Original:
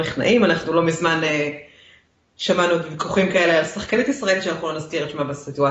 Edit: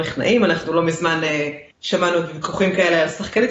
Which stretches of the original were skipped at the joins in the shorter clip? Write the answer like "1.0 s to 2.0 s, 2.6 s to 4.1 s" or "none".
1.7 s to 2.3 s